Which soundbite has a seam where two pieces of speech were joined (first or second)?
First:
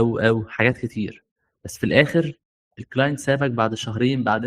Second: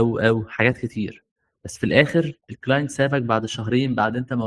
second